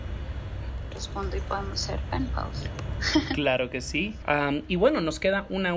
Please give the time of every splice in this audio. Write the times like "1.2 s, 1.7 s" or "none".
4.2 s